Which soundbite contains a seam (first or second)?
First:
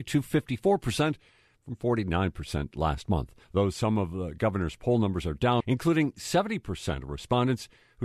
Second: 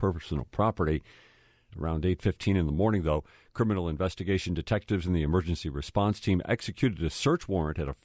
first